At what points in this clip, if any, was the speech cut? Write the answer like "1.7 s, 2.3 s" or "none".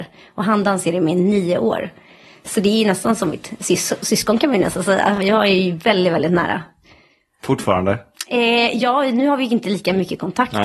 none